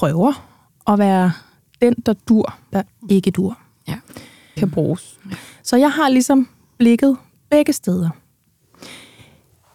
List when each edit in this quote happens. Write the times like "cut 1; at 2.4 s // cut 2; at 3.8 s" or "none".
cut 1; at 2.7 s // cut 2; at 4.6 s